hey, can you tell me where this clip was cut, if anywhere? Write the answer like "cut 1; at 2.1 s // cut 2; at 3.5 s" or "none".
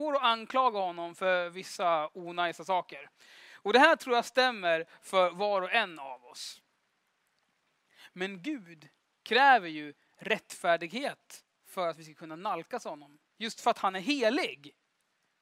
none